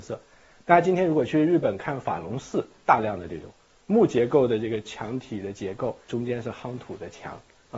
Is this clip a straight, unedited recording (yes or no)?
yes